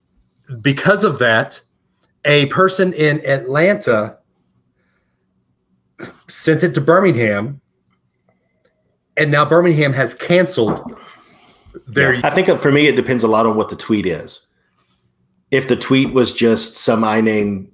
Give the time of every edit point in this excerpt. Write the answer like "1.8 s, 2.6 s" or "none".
12.2 s

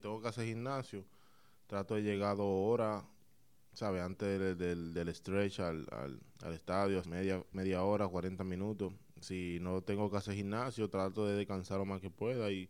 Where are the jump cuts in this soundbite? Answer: 7.0 s

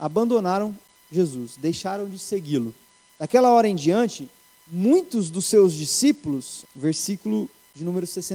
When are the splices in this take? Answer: 3.1 s, 6.7 s

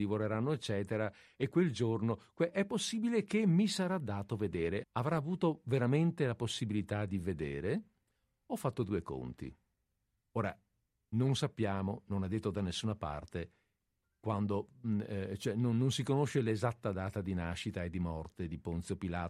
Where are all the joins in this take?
4.8 s

